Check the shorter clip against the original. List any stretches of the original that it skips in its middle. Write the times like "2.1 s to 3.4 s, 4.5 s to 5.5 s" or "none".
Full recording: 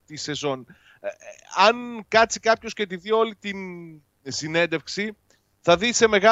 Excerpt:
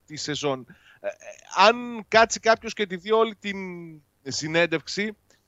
none